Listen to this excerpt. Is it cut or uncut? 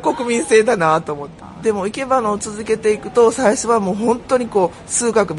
uncut